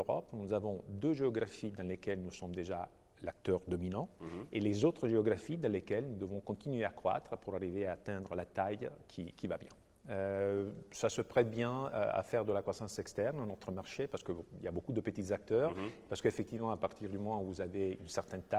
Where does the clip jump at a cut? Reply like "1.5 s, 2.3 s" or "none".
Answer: 10.0 s